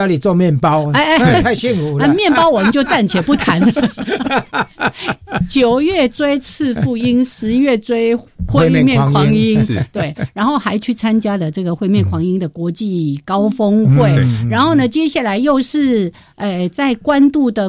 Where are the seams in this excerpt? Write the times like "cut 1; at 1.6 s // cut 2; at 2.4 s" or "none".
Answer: none